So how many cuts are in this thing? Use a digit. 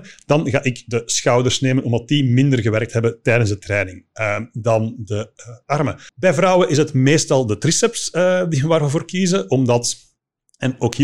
1